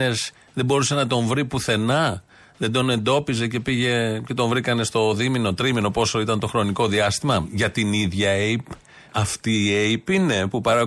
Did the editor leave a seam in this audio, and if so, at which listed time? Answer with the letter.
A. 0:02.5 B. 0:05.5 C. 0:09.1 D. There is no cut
C